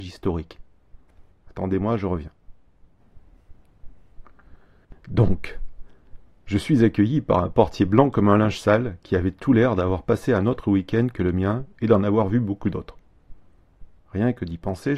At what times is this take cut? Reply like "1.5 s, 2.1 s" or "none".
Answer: 1.3 s, 14.0 s